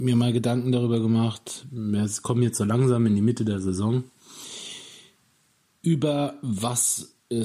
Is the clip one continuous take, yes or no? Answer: yes